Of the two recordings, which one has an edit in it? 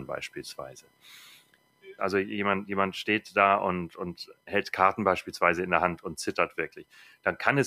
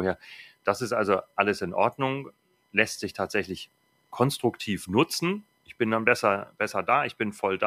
first; 1 cut; at 2.0 s

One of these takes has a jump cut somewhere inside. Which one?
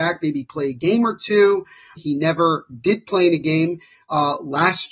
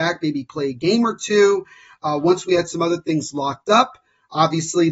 first; 1 cut; at 2.0 s

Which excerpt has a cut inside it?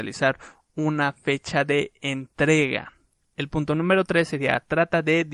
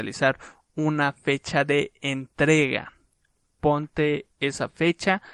first; 1 cut; at 3.2 s

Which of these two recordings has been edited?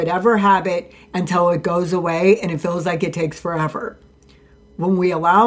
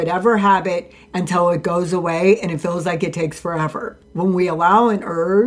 second; 1 cut; at 4.0 s

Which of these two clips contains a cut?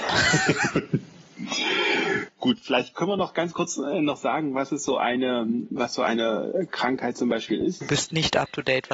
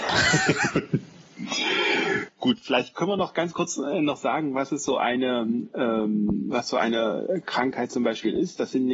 first; 2 cuts; at 5.7 s, 7.8 s

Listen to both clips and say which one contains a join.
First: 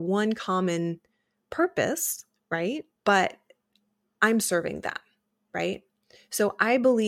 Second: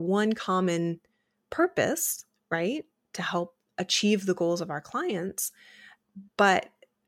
first; 1 cut; at 3.0 s

